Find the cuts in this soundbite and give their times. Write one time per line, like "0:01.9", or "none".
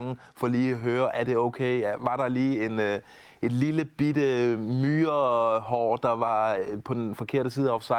none